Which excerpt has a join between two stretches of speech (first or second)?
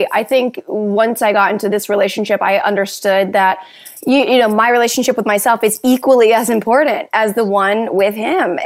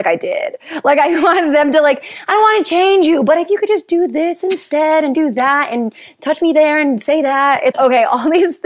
second